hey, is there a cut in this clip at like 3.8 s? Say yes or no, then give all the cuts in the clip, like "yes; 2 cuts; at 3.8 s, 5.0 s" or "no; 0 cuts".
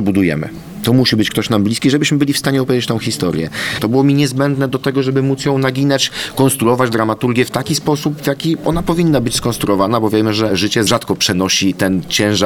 yes; 1 cut; at 3.8 s